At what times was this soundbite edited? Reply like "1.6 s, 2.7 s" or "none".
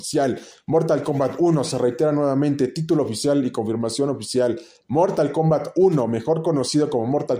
none